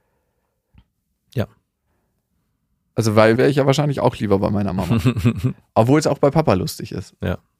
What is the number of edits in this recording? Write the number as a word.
two